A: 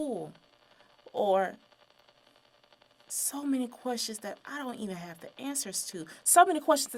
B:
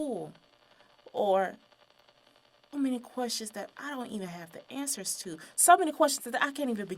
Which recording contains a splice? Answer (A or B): B